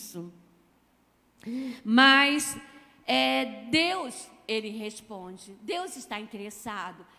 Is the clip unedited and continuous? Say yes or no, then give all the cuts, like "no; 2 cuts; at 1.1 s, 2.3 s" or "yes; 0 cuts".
yes; 0 cuts